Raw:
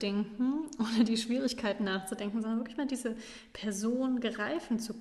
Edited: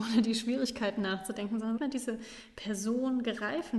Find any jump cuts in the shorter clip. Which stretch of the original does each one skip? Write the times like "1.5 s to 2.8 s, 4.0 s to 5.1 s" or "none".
2.6 s to 2.7 s